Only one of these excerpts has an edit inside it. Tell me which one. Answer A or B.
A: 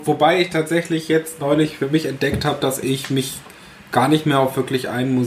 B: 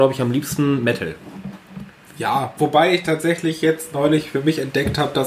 B